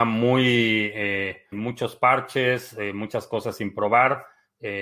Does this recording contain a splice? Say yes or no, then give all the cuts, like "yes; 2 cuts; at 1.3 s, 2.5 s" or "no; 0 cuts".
yes; 1 cut; at 1.5 s